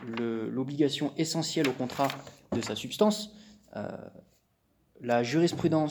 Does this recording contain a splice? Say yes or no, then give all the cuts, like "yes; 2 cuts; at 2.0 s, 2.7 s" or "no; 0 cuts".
no; 0 cuts